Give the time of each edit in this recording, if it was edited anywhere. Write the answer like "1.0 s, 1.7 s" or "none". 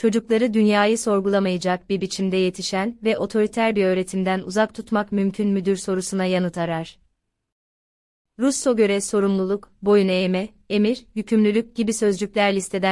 none